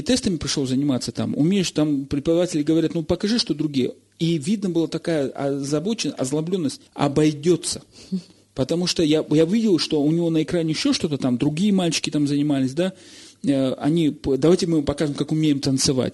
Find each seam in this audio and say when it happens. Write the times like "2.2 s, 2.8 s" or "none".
6.9 s